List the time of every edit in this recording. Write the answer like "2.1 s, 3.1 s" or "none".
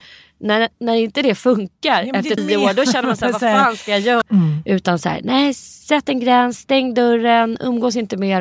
2.4 s, 4.2 s